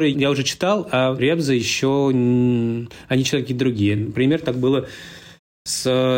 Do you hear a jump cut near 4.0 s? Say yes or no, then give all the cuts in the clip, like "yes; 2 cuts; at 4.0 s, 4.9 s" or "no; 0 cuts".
no; 0 cuts